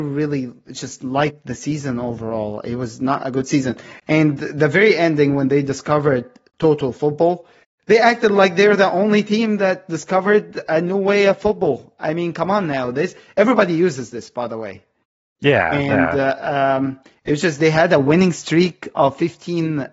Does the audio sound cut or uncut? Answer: uncut